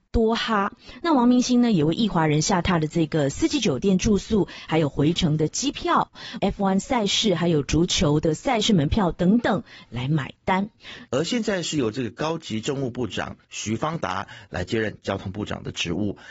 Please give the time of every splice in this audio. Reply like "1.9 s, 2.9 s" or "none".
6.4 s, 11.1 s